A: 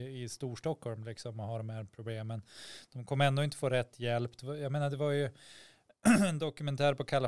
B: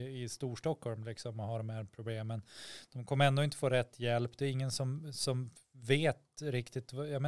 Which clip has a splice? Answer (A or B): A